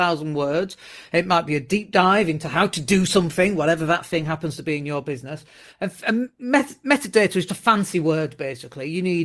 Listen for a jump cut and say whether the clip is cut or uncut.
cut